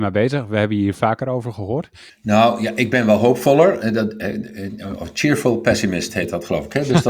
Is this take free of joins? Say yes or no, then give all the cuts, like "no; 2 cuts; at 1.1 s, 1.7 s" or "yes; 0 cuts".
no; 1 cut; at 2.1 s